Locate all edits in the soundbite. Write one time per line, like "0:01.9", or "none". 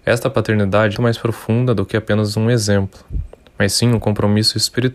0:00.9